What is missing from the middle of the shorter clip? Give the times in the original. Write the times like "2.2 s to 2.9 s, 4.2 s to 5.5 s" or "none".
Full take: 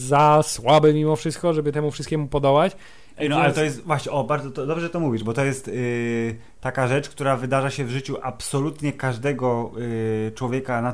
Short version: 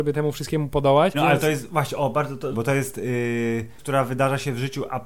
2.7 s to 3.3 s, 4.7 s to 5.2 s, 6.5 s to 7.1 s